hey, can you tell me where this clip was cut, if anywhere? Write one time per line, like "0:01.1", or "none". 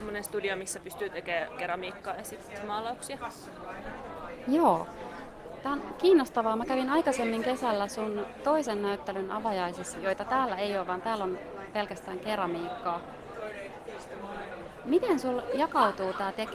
0:09.9